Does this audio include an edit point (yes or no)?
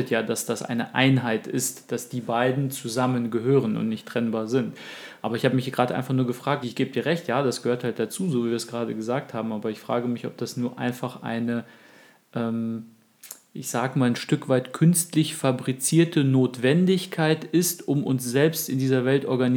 yes